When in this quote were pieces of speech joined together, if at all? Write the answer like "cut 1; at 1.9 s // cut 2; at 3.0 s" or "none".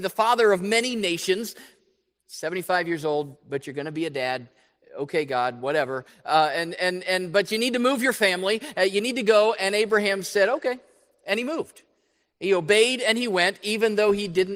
none